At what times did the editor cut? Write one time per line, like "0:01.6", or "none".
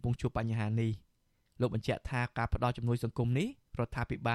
none